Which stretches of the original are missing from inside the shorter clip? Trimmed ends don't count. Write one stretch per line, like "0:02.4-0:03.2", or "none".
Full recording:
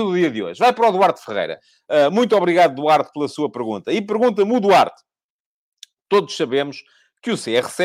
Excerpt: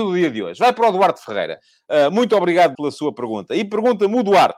0:02.8-0:03.1